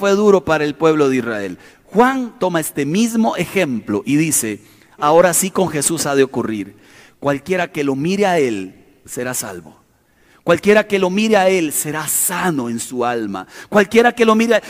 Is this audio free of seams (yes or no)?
no